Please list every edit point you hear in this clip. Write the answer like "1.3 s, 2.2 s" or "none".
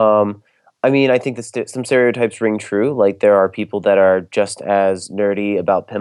none